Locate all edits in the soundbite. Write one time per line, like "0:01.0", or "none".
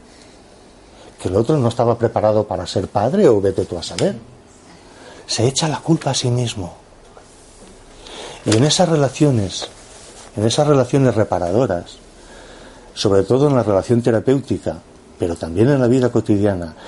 none